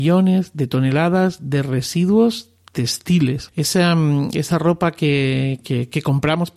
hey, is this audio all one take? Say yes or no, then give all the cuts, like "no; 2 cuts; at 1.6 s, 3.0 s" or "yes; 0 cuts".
no; 2 cuts; at 3.5 s, 5.6 s